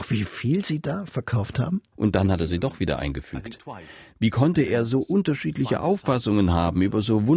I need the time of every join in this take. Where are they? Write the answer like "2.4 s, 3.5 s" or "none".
1.9 s